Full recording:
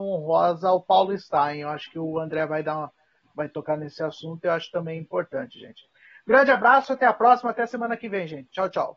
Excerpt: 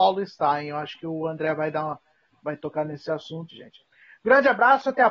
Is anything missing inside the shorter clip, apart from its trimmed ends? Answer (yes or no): yes